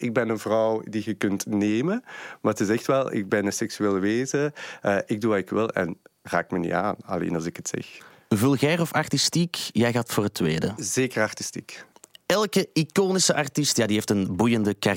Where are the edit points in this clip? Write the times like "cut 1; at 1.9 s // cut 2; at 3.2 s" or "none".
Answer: none